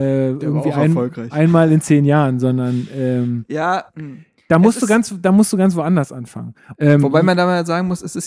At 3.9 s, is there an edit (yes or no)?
yes